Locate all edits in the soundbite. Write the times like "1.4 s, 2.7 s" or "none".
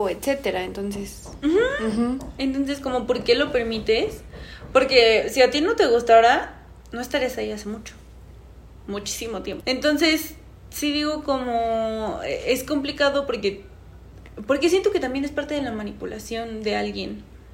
9.6 s